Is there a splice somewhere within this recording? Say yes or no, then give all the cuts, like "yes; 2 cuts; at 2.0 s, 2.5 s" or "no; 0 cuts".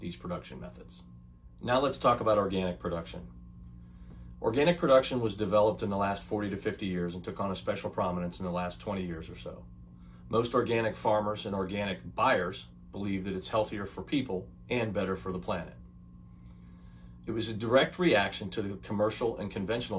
no; 0 cuts